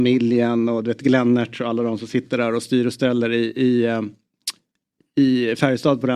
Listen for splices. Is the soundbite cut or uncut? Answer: uncut